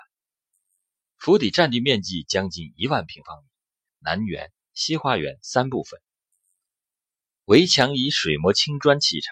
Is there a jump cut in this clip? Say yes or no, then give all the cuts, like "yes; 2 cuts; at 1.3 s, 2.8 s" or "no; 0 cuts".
yes; 2 cuts; at 1.0 s, 3.9 s